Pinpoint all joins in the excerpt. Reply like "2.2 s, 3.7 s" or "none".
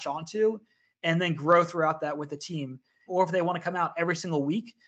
3.1 s